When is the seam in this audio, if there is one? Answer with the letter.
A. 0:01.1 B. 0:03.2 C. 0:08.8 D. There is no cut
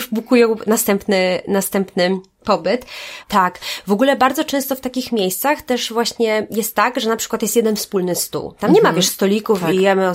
B